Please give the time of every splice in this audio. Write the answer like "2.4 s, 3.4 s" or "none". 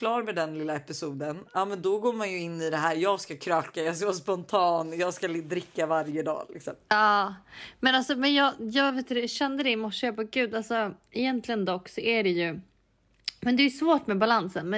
none